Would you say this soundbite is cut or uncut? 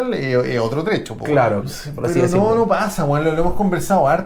cut